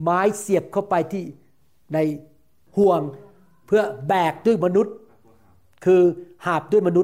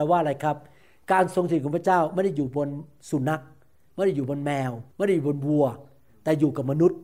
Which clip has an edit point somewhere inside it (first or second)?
second